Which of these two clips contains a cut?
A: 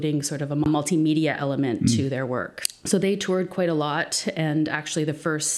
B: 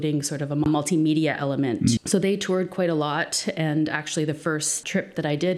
B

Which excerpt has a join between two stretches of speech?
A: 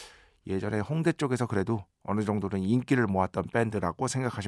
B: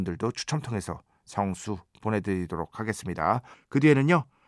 B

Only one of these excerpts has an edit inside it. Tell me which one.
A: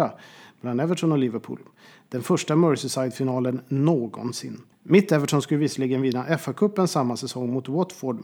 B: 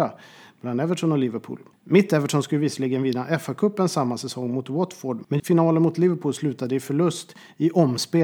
B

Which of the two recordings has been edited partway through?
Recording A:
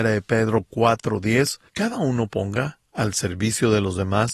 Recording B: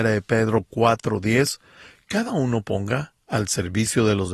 A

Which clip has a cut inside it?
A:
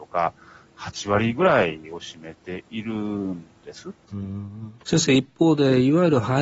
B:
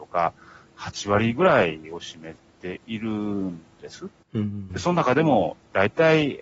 A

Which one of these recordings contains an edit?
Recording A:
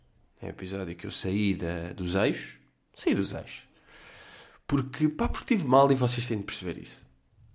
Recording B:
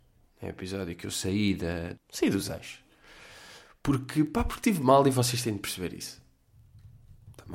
B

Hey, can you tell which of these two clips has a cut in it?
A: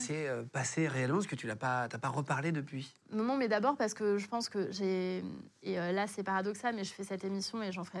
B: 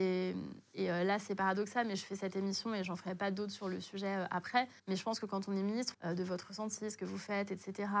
B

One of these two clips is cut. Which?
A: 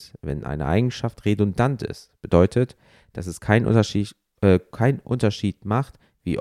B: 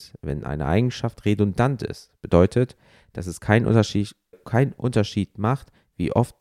B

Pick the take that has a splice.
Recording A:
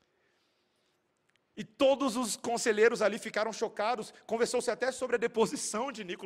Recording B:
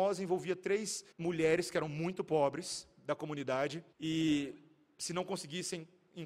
B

